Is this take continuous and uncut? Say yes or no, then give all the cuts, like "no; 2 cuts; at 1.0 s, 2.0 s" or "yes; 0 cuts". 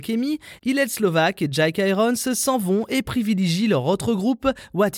yes; 0 cuts